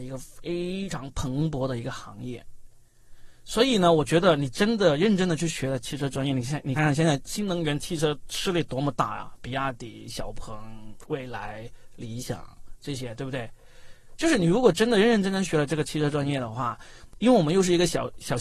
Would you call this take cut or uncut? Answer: cut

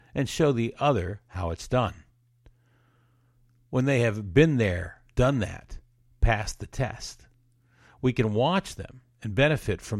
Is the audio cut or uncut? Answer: uncut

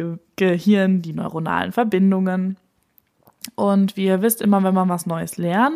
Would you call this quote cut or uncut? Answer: uncut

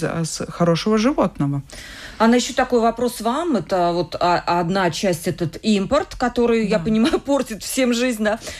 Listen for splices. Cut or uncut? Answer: uncut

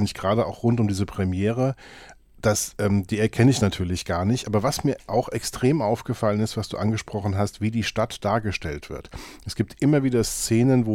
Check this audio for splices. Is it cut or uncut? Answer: uncut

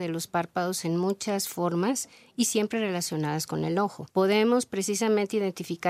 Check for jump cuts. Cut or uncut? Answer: cut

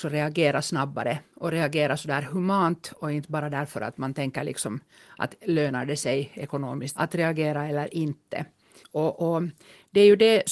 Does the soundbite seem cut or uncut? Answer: cut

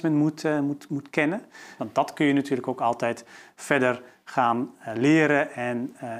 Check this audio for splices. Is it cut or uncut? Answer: cut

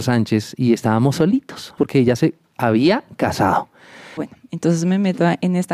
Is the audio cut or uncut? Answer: cut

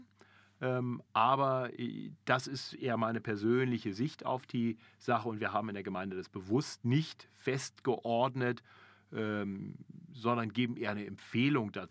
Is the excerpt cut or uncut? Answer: uncut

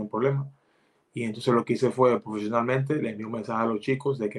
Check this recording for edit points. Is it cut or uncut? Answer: uncut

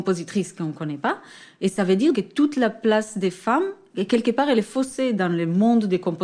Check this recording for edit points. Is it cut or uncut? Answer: cut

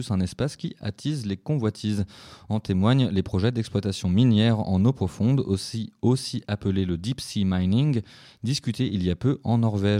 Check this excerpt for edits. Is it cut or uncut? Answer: uncut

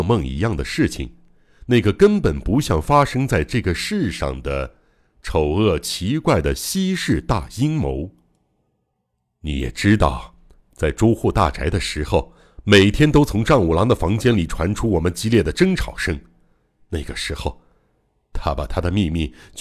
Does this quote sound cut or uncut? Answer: uncut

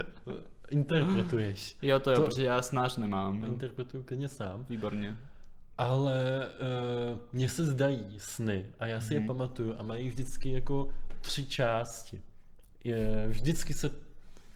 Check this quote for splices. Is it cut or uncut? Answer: cut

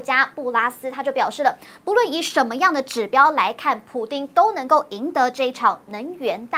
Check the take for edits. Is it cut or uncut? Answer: uncut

